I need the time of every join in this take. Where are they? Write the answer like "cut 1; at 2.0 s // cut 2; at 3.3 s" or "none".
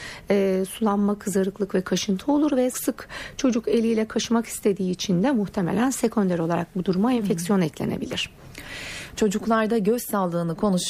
cut 1; at 2.7 s // cut 2; at 9.2 s